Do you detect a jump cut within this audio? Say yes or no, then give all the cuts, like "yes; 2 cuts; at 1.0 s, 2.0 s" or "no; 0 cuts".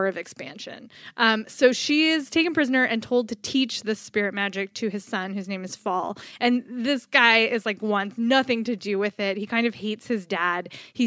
no; 0 cuts